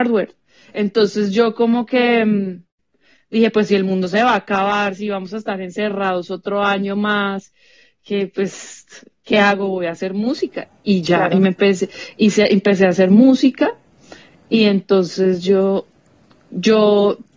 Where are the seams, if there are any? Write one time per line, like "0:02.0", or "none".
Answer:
none